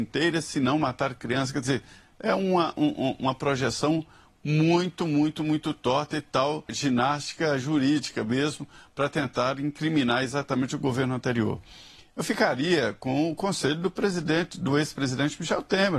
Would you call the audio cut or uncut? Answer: cut